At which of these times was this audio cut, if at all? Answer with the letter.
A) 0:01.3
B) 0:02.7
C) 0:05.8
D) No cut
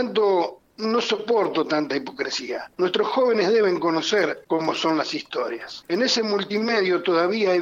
D